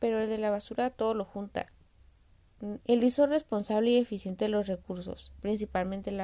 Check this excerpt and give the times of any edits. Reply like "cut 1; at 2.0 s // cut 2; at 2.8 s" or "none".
cut 1; at 2.8 s